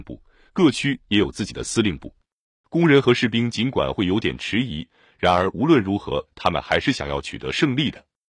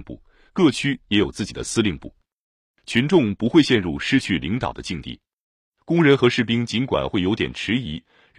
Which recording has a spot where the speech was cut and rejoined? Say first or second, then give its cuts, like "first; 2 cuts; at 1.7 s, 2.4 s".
first; 1 cut; at 2.6 s